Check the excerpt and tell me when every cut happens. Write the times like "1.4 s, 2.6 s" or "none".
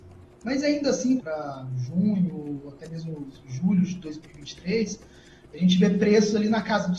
1.2 s